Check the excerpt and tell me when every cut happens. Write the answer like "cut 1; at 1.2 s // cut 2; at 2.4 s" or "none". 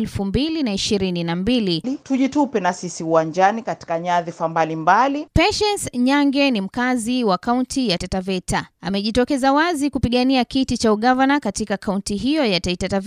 cut 1; at 1.8 s // cut 2; at 8.0 s